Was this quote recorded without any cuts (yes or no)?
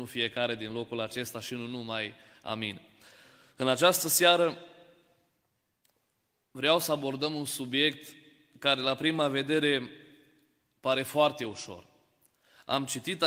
yes